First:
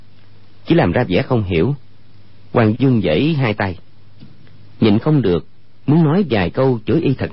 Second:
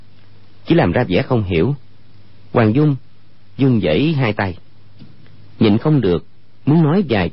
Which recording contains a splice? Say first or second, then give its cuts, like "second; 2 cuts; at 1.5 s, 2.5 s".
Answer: first; 1 cut; at 2.7 s